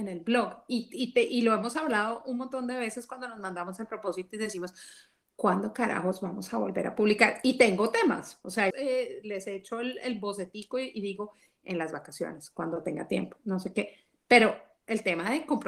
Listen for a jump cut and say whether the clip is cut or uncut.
cut